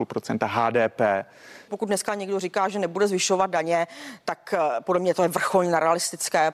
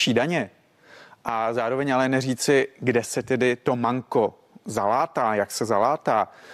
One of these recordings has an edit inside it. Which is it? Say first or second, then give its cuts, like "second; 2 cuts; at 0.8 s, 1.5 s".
first; 1 cut; at 1.7 s